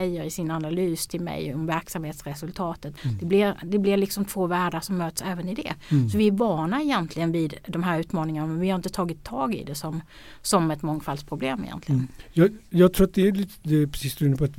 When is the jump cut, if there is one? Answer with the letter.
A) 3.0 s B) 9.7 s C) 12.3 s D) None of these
A